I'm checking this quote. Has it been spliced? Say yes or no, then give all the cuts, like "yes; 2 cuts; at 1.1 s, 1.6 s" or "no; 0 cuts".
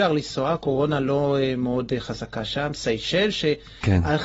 no; 0 cuts